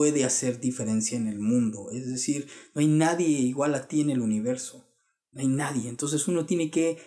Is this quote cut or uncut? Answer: uncut